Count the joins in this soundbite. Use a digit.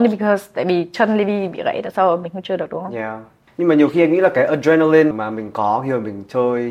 2